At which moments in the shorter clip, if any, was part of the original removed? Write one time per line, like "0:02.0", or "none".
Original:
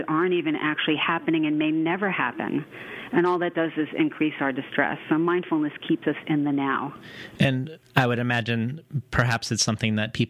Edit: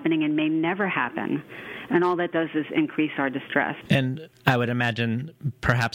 0:03.8